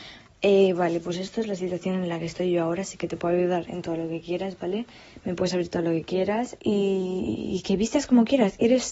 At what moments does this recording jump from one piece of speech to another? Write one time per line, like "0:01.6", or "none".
0:06.6